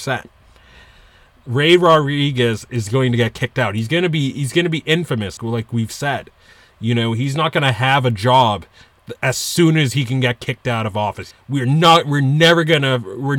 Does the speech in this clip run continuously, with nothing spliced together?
no; 2 cuts; at 5.4 s, 11.3 s

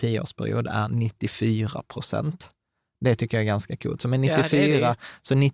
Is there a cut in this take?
no; 0 cuts

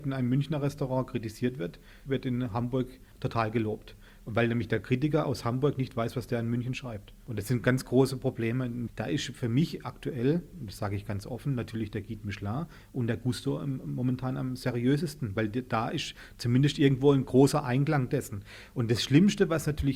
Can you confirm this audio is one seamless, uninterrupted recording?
yes; 0 cuts

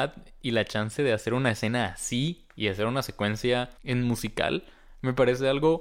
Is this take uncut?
no; 1 cut; at 3.8 s

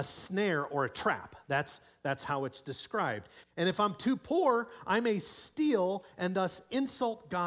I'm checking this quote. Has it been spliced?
yes; 1 cut; at 3.4 s

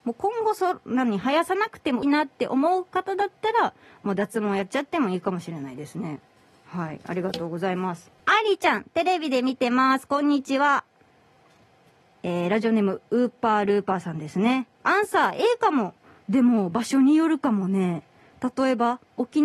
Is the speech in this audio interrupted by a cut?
yes; 2 cuts; at 2.0 s, 8.2 s

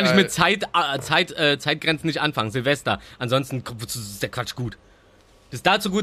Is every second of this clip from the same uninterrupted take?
yes; 0 cuts

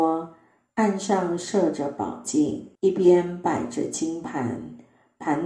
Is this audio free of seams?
no; 1 cut; at 2.8 s

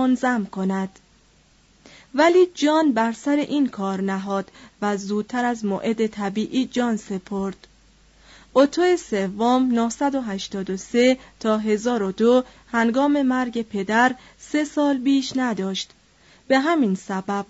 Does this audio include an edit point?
no; 0 cuts

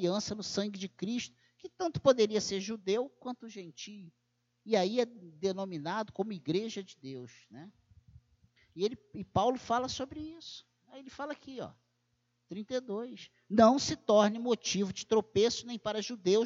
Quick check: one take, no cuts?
yes; 0 cuts

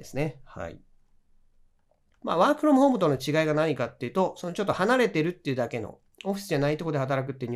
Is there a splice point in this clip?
yes; 1 cut; at 2.2 s

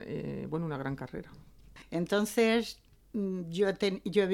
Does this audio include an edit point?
yes; 1 cut; at 1.8 s

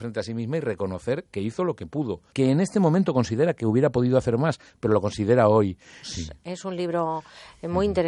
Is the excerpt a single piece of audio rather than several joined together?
no; 2 cuts; at 2.3 s, 6.0 s

